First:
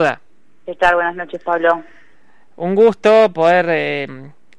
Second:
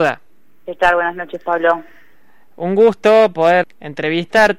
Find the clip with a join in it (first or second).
second